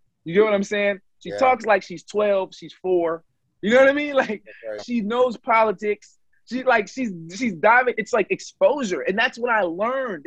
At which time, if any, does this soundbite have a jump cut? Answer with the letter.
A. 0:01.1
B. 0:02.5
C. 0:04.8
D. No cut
C